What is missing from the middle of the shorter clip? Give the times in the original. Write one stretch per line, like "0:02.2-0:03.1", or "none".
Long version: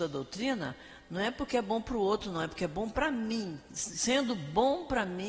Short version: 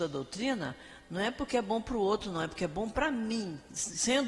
none

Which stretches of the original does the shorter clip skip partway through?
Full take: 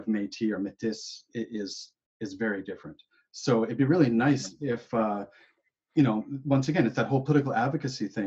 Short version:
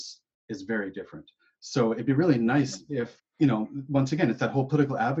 0:04.9-0:05.7

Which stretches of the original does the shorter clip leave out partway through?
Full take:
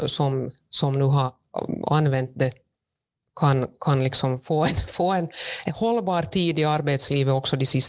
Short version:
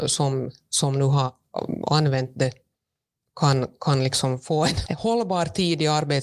0:04.9-0:05.6

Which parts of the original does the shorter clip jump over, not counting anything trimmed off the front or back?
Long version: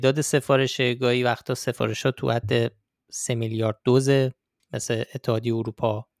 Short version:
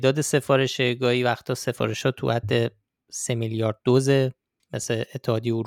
none

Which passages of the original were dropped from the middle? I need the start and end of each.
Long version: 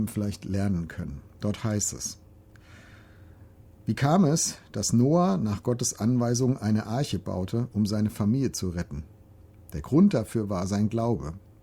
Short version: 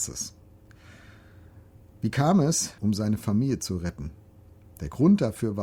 0:04.6-0:07.7

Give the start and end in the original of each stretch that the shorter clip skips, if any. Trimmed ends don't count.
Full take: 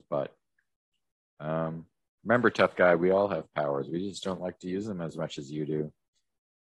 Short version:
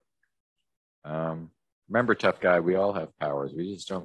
none

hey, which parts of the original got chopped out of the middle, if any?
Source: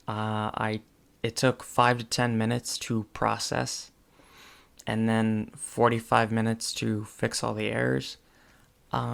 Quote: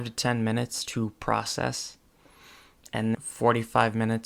0:05.1-0:05.5

